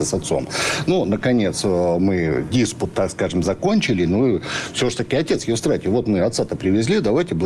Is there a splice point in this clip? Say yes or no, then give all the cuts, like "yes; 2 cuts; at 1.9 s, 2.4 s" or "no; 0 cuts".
no; 0 cuts